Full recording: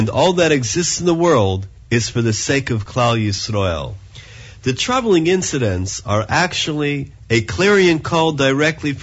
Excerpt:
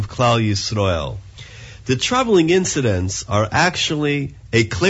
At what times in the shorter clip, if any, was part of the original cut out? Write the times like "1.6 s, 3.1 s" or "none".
none